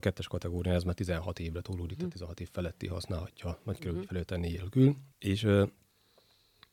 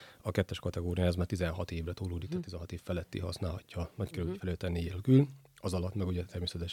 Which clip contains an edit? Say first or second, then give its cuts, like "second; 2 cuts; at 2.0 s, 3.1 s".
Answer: first; 1 cut; at 5.1 s